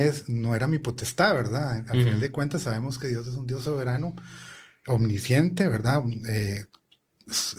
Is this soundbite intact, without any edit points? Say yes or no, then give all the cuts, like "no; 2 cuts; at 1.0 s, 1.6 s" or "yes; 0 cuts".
yes; 0 cuts